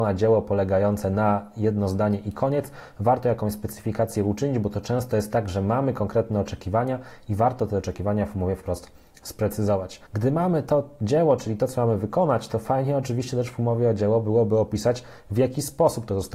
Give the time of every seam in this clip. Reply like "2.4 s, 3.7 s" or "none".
10.1 s

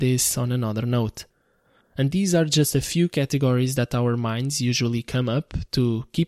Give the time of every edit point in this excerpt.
1.8 s

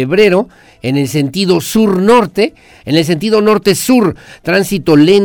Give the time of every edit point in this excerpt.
2.8 s

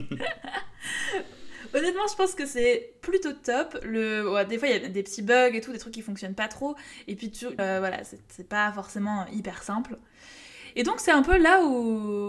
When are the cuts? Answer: 7.6 s, 10.7 s

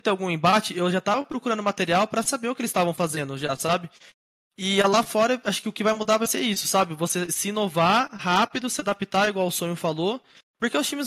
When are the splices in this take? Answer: none

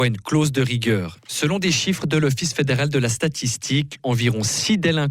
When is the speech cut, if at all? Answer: 1.2 s, 4.0 s

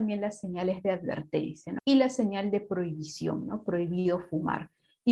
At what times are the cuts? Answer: 1.8 s

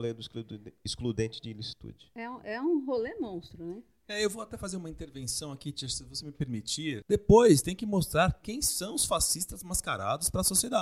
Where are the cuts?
7.0 s

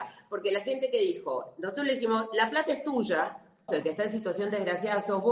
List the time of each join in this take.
3.7 s

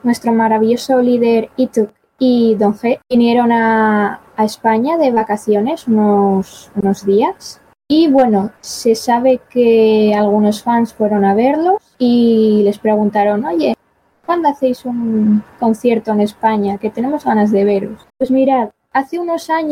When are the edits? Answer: 18.1 s

